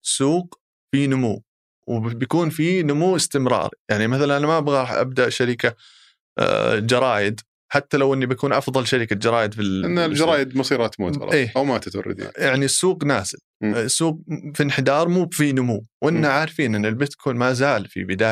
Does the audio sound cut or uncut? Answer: uncut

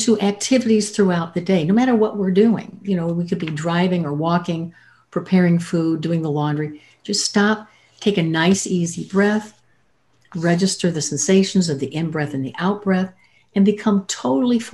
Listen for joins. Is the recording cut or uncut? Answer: uncut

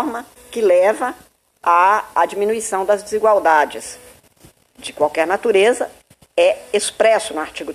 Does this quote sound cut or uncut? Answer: cut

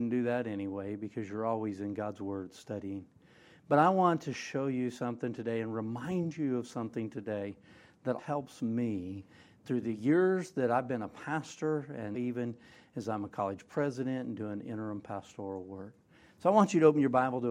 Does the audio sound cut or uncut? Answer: cut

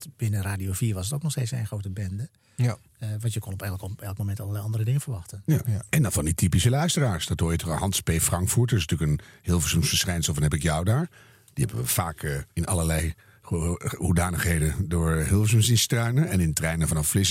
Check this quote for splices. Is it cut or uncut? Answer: cut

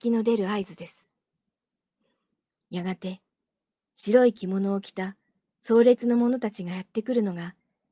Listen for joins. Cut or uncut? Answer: uncut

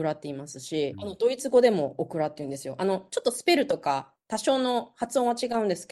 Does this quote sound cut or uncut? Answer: cut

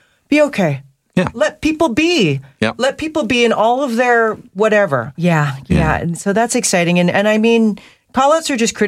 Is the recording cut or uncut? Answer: cut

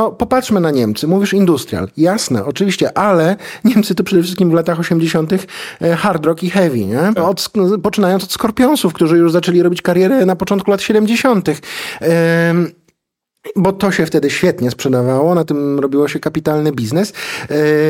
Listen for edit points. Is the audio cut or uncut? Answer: cut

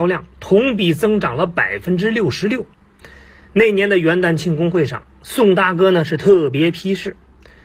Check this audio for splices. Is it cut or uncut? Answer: uncut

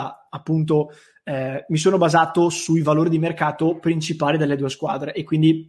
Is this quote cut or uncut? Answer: uncut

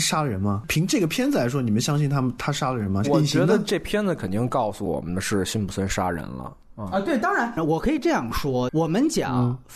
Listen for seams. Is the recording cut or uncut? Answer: cut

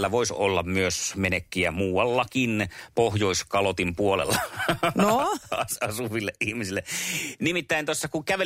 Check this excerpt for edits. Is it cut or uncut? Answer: uncut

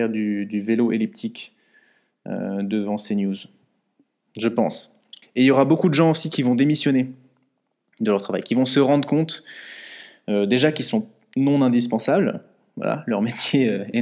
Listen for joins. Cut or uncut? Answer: uncut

